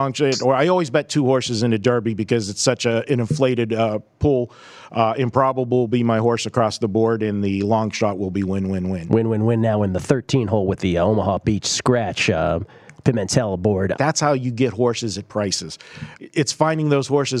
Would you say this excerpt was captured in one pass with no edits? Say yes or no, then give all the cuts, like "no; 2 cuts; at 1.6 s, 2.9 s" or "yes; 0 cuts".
no; 2 cuts; at 13.9 s, 16.2 s